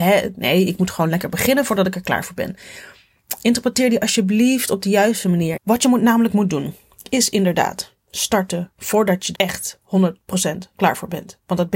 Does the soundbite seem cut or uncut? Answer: cut